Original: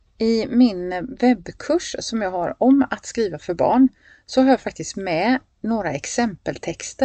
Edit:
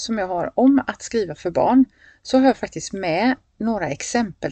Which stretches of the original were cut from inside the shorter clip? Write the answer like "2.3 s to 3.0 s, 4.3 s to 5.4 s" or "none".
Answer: none